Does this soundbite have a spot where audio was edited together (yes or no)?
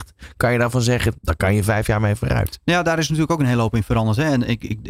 yes